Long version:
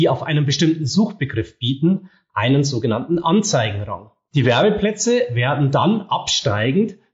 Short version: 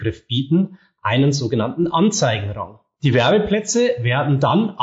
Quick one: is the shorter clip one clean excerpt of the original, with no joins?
yes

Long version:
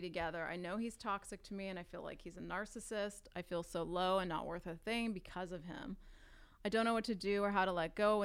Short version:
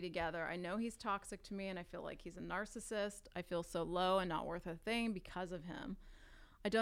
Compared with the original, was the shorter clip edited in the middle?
no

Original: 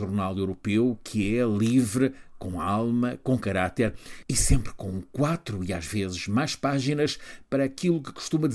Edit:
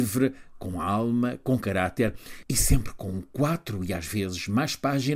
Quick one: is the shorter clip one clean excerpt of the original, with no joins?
yes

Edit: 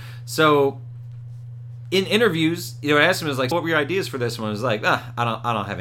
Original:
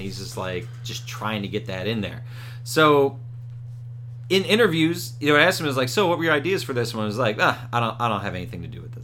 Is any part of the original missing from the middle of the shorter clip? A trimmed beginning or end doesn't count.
yes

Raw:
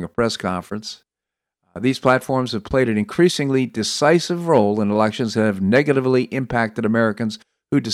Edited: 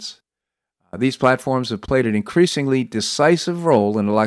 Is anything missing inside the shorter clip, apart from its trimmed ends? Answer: no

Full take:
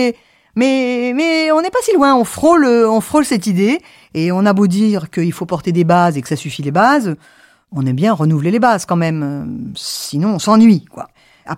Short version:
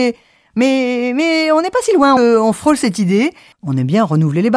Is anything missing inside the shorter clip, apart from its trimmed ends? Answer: yes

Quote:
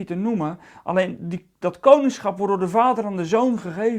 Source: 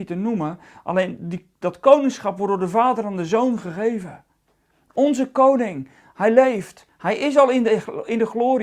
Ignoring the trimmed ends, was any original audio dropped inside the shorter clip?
no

